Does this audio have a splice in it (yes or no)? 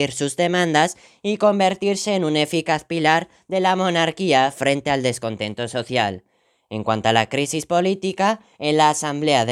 no